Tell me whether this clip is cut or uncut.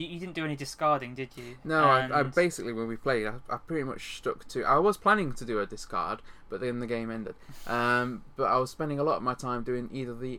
uncut